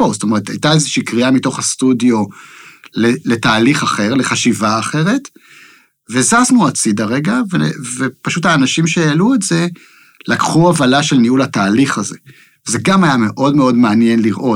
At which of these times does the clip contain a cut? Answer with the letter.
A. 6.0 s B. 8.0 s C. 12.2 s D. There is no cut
D